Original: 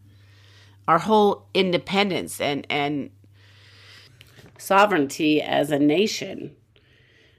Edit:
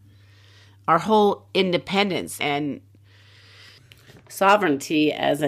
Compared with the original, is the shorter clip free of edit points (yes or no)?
no